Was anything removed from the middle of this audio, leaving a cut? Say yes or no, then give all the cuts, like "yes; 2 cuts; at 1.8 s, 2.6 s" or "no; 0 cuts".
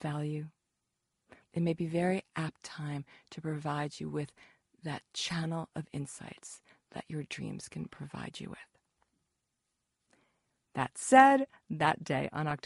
yes; 1 cut; at 1.4 s